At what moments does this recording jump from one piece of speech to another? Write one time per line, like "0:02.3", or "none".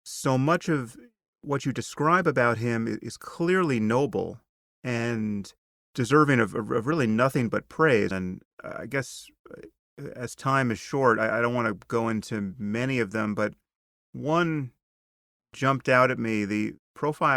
0:08.1